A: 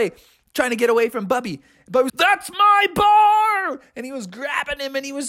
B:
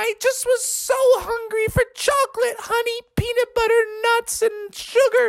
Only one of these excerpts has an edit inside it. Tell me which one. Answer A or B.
A